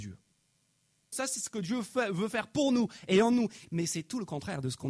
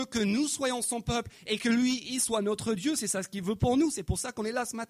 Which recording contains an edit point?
first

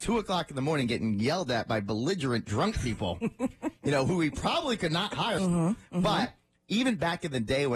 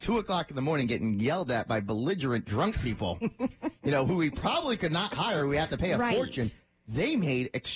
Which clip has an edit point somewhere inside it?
first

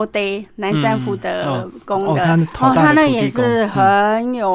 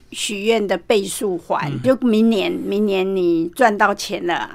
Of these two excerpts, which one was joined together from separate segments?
second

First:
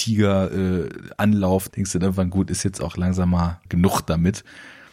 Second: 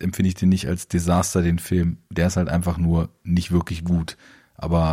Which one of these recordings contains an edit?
first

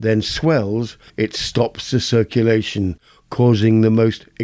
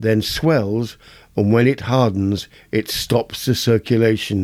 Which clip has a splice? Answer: first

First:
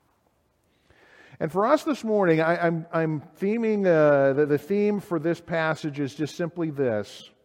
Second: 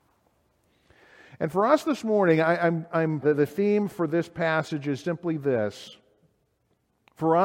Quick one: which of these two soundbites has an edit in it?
second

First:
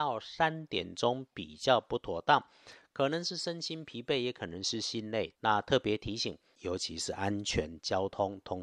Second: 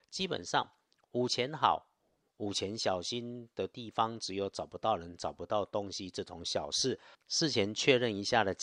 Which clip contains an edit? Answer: first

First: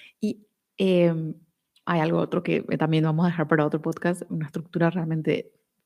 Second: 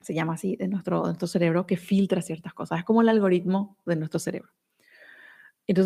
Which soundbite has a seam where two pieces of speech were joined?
first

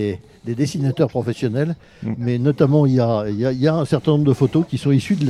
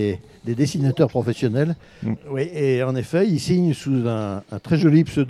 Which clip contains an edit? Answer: second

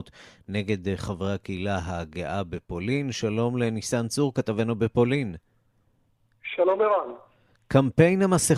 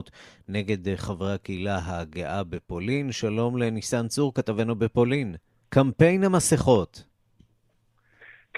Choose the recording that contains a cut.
second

